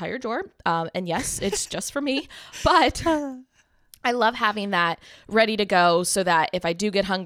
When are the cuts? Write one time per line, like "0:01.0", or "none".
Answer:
none